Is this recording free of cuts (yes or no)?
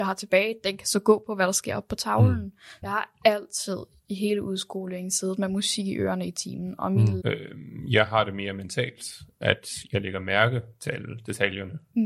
no